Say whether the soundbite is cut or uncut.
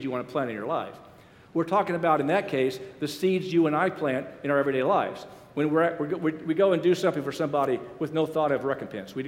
uncut